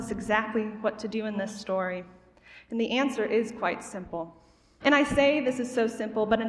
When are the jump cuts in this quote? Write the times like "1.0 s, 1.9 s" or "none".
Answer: 4.8 s

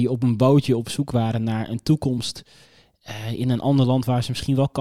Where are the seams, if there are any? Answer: none

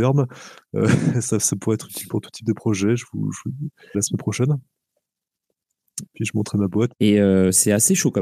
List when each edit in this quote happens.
3.9 s, 6.9 s

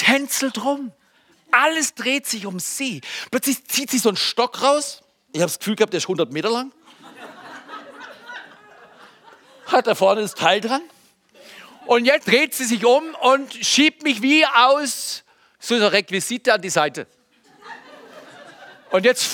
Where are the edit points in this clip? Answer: 12.2 s

